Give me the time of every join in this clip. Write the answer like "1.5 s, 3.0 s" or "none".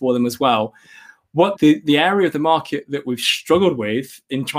1.6 s